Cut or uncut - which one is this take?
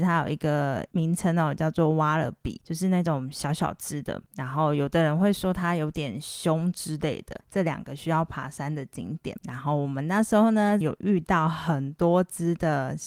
cut